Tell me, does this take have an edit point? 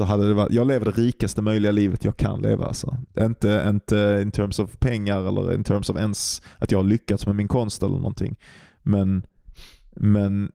no; 0 cuts

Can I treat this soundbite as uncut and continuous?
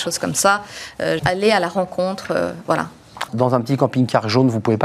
no; 2 cuts; at 1.2 s, 3.3 s

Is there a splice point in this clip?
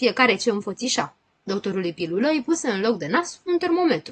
yes; 1 cut; at 1.3 s

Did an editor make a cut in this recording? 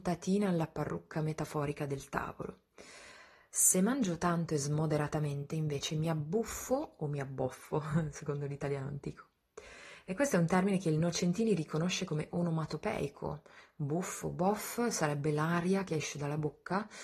no; 0 cuts

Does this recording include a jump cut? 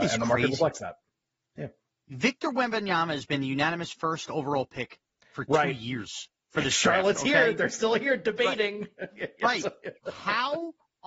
no; 0 cuts

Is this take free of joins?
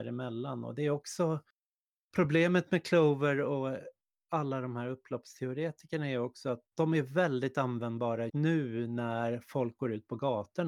no; 2 cuts; at 6.7 s, 8.3 s

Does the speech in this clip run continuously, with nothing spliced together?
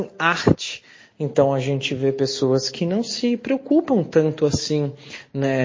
no; 1 cut; at 1.1 s

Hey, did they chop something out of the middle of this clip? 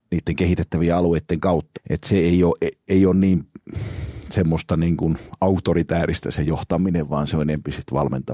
yes; 1 cut; at 1.7 s

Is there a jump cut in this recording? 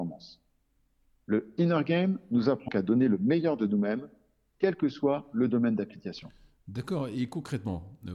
yes; 1 cut; at 2.7 s

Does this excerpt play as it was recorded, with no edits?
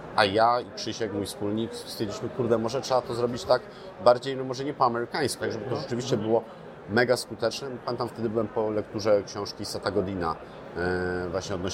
no; 1 cut; at 5.4 s

